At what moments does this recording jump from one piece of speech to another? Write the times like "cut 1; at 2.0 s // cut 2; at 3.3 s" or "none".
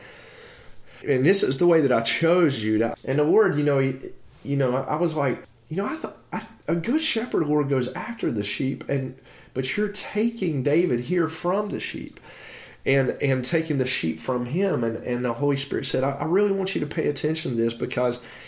cut 1; at 1.0 s // cut 2; at 2.9 s